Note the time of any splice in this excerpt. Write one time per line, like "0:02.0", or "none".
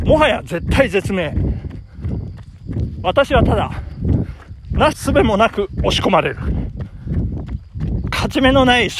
0:04.9